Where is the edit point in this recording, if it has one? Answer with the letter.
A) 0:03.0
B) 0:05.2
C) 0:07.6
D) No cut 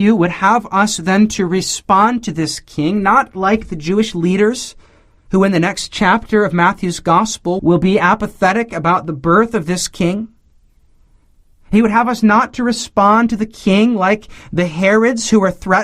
C